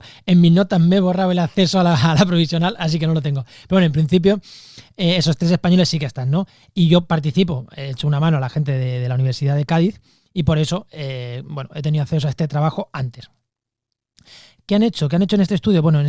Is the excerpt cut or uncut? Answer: uncut